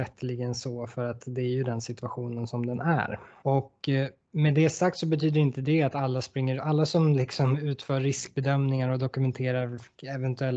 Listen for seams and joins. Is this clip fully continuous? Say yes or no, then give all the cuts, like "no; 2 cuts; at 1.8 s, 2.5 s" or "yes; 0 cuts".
no; 1 cut; at 3.4 s